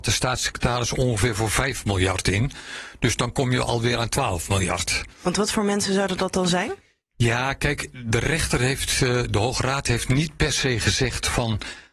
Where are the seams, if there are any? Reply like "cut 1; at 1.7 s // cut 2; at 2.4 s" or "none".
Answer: none

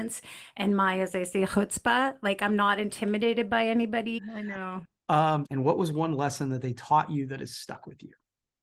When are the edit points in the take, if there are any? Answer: cut 1; at 4.2 s // cut 2; at 5.4 s

